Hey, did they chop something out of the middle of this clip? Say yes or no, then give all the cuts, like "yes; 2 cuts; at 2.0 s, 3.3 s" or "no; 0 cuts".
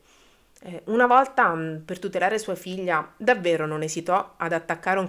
no; 0 cuts